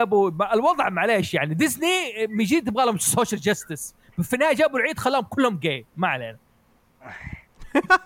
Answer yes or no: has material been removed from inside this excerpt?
no